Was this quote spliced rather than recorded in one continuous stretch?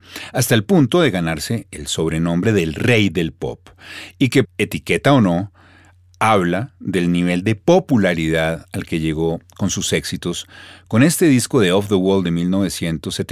yes; 1 cut; at 4.4 s

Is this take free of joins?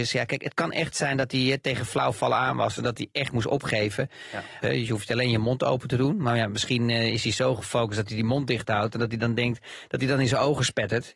no; 1 cut; at 4.6 s

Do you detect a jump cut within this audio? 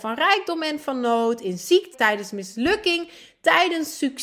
yes; 1 cut; at 1.9 s

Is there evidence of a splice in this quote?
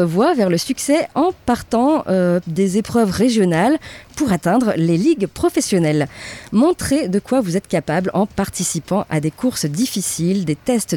no; 0 cuts

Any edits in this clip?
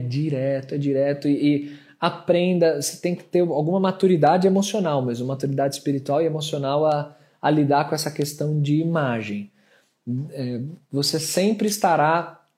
no; 0 cuts

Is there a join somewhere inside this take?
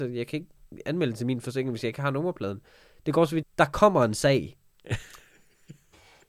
yes; 1 cut; at 3.4 s

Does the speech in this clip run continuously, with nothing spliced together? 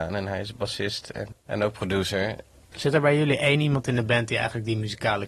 no; 2 cuts; at 1.3 s, 2.7 s

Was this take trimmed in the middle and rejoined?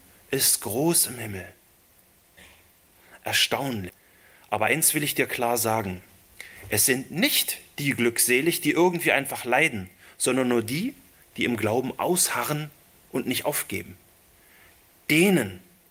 no; 0 cuts

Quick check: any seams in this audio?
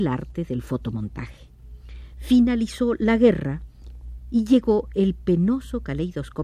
yes; 1 cut; at 2.1 s

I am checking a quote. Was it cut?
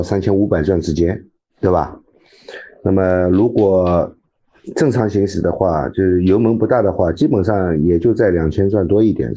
no; 0 cuts

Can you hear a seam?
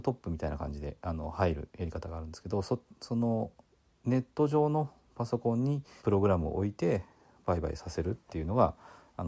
yes; 1 cut; at 6.0 s

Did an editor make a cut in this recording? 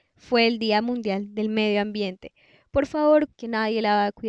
yes; 1 cut; at 3.3 s

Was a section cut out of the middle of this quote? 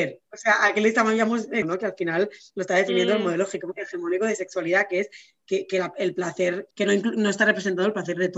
yes; 1 cut; at 1.6 s

